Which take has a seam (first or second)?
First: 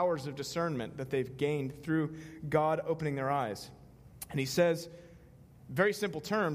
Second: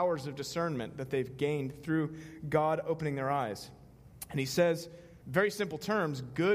second